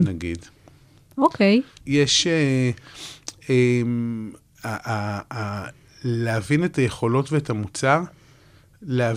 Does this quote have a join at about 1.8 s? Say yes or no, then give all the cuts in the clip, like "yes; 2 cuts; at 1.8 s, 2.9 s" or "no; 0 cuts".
yes; 1 cut; at 1.8 s